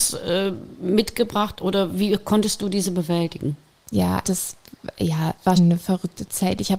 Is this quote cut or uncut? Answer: cut